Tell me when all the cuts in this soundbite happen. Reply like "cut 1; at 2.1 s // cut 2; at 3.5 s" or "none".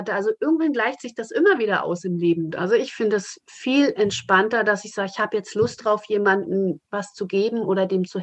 cut 1; at 2.5 s